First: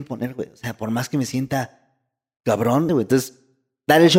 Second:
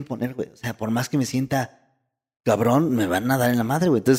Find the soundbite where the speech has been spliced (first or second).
first